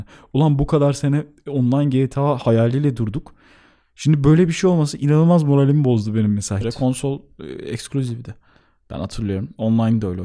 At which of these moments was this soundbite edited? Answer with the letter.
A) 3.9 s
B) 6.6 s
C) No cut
B